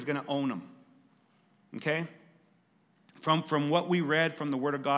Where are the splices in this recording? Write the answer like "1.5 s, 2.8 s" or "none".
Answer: none